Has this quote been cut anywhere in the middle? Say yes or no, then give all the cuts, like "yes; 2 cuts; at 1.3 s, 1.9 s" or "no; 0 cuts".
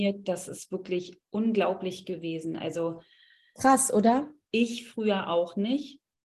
yes; 1 cut; at 4.4 s